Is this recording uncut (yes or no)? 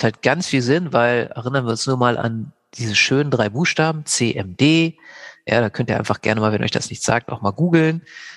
yes